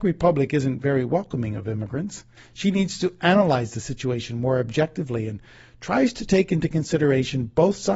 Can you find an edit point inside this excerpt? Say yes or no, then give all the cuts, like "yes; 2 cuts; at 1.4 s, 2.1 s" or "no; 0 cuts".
yes; 1 cut; at 2.4 s